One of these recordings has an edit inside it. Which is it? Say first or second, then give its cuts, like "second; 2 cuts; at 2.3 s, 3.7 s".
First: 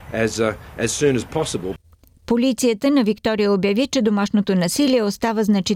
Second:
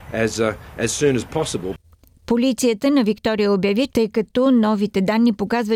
second; 1 cut; at 3.9 s